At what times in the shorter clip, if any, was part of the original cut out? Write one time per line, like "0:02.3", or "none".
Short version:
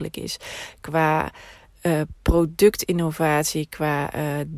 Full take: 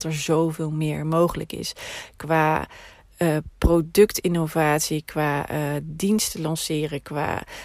none